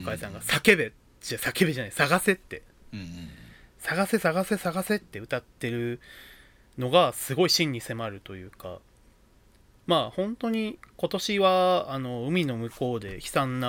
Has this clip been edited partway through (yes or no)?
no